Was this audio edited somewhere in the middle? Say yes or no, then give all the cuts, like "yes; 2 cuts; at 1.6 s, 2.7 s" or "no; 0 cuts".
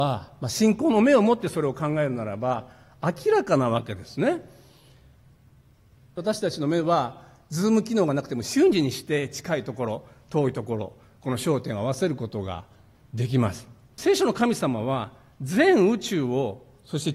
yes; 2 cuts; at 6.2 s, 14.0 s